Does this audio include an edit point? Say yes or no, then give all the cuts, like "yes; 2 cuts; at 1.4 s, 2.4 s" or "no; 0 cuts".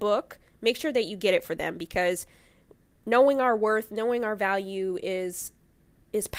no; 0 cuts